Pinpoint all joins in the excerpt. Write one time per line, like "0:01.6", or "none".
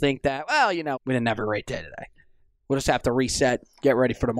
0:00.9